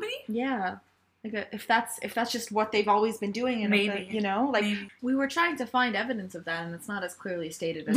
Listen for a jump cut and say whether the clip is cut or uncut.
cut